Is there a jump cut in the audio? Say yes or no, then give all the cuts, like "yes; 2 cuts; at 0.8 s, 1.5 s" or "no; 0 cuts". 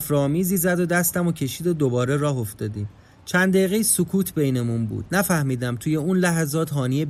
no; 0 cuts